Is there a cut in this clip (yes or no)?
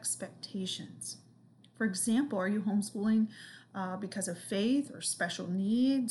no